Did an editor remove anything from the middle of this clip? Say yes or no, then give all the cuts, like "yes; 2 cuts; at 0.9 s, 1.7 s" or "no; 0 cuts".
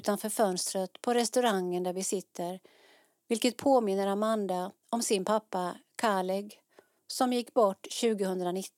no; 0 cuts